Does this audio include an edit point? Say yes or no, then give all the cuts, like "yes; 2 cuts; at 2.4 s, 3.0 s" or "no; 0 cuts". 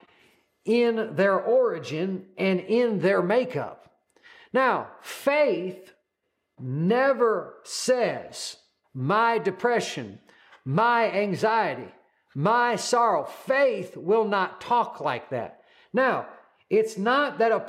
yes; 1 cut; at 8.8 s